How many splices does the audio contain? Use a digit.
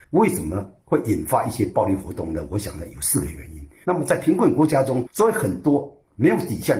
2